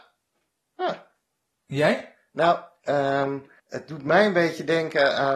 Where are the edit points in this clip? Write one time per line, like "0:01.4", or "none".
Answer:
0:03.6